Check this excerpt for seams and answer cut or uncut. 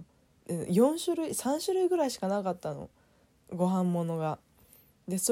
uncut